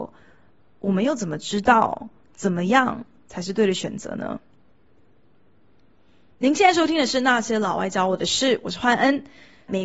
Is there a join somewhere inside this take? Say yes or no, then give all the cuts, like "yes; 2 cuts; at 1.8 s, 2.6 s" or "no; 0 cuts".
no; 0 cuts